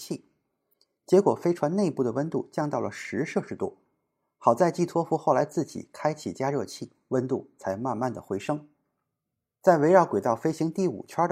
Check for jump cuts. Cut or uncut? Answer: uncut